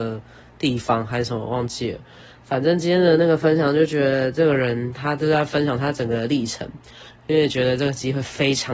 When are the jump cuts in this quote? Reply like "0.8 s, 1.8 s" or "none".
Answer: 7.1 s